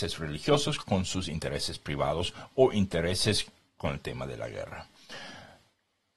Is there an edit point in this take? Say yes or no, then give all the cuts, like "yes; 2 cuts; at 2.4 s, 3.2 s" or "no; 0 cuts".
no; 0 cuts